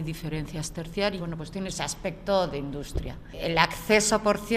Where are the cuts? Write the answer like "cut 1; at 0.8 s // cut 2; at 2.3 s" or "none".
cut 1; at 1.2 s